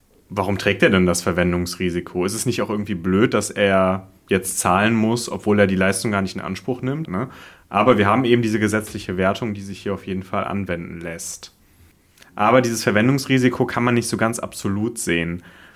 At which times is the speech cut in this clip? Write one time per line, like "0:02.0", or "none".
0:07.0